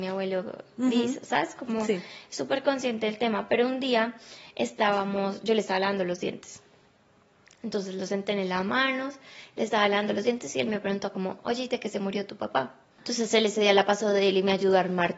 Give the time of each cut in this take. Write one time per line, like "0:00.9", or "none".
0:13.0